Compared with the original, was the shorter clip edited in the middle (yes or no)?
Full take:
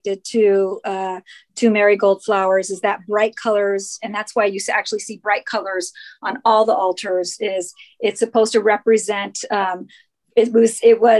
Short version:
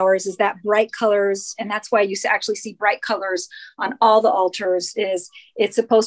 no